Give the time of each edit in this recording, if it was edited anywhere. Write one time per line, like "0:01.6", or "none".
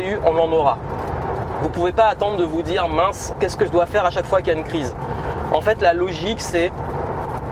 0:03.3